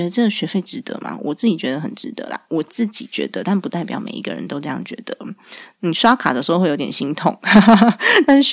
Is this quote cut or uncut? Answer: uncut